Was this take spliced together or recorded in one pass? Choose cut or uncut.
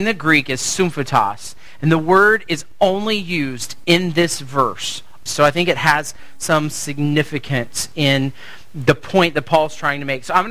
cut